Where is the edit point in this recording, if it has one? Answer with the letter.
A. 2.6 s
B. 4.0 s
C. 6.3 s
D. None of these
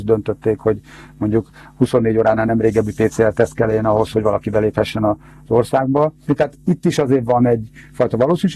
C